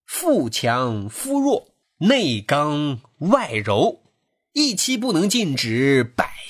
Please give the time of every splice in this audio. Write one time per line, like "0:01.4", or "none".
none